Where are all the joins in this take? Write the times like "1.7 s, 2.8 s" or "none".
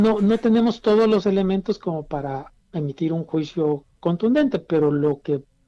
2.6 s